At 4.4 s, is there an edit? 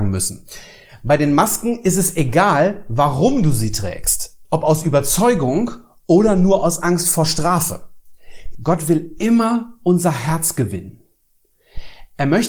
yes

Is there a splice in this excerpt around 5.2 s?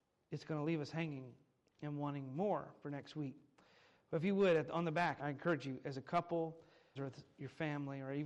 yes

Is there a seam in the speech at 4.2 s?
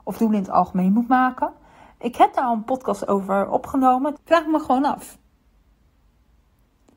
yes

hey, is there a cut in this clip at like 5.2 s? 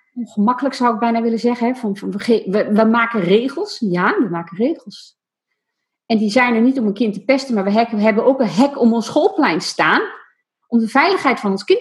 no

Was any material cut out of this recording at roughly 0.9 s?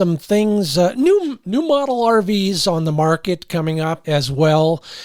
no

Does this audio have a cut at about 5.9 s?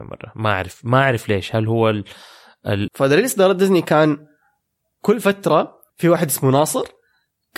yes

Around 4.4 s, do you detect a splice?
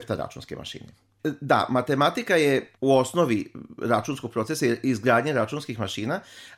no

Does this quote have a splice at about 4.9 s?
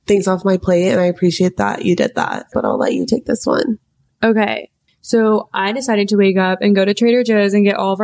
yes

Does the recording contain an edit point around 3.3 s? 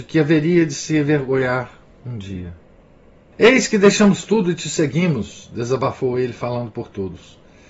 yes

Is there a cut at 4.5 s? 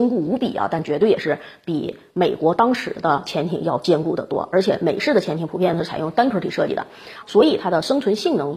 no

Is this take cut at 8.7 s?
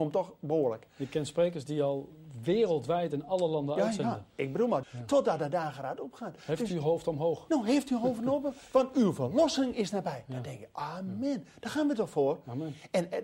no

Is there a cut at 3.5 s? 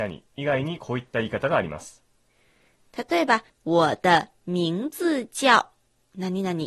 yes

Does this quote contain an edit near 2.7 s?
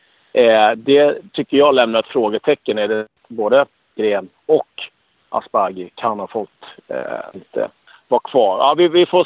no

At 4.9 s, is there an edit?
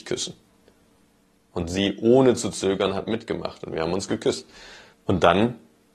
yes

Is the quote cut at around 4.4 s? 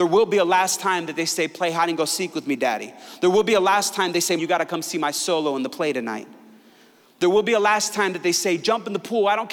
yes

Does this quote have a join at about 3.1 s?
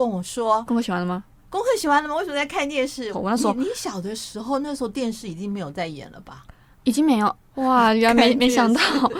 yes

